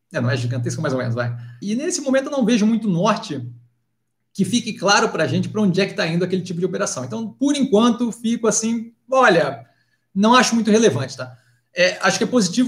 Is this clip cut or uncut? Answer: cut